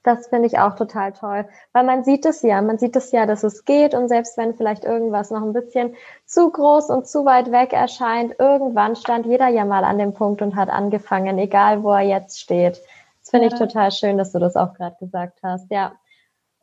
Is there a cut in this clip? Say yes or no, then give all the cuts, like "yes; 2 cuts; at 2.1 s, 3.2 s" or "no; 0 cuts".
no; 0 cuts